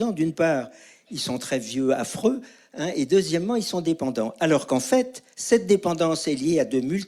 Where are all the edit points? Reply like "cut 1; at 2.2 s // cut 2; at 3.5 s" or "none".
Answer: cut 1; at 5.3 s